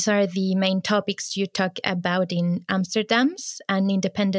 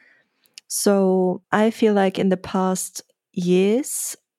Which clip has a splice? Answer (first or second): second